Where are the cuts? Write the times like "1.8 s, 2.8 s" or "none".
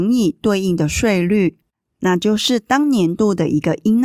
none

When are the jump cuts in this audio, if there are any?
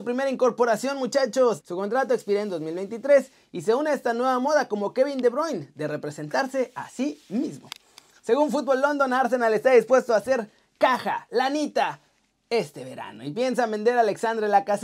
1.6 s

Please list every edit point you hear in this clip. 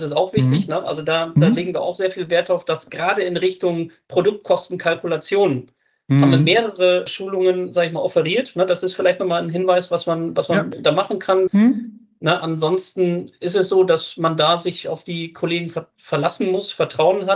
11.5 s

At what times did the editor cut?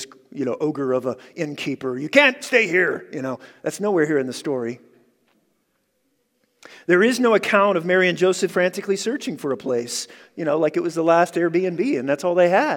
8.5 s

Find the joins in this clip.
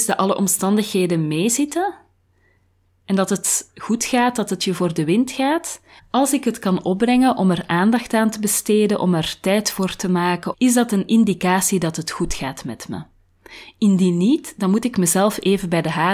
6.0 s, 10.5 s

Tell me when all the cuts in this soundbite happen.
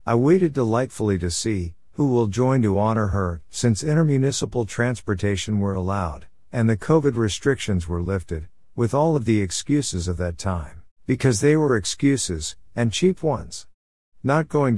10.9 s

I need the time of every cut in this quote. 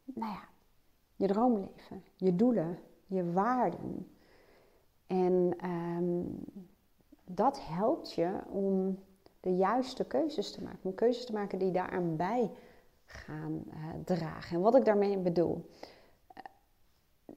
none

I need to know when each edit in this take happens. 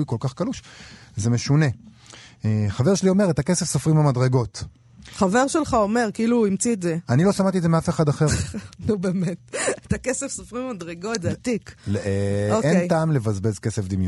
none

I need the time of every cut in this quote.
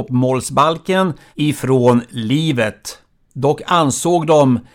none

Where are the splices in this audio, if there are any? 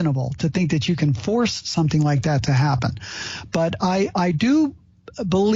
none

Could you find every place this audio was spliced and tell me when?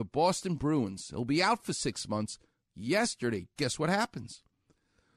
3.6 s

